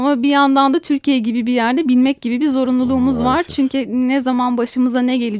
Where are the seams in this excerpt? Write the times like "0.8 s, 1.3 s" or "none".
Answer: none